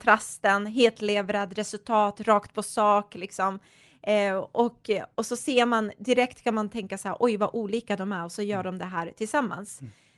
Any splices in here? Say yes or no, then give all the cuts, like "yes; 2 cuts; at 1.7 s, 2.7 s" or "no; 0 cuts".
no; 0 cuts